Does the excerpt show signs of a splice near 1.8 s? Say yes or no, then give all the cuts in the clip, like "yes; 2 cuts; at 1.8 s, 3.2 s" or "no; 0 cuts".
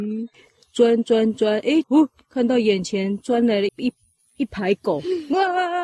yes; 2 cuts; at 1.8 s, 3.7 s